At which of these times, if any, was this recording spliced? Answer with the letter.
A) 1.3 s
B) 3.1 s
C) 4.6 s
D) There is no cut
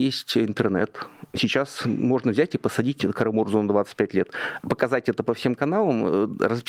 D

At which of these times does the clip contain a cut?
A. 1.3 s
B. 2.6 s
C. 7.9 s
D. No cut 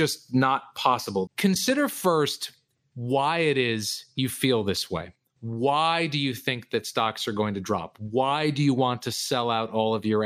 A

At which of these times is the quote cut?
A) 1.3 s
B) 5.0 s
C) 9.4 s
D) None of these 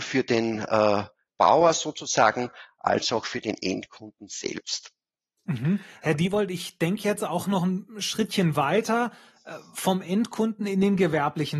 A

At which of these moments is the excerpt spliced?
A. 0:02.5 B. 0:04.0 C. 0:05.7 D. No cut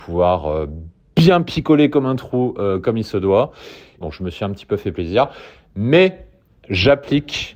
B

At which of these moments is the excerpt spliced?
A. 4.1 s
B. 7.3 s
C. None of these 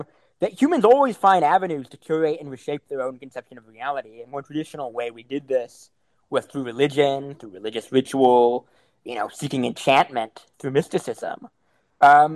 C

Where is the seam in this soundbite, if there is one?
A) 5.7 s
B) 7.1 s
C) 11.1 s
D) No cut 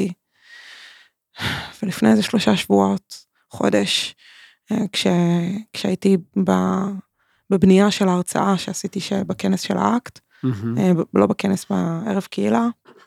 D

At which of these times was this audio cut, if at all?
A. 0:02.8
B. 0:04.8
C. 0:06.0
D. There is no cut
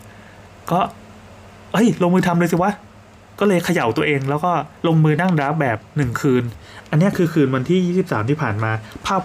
B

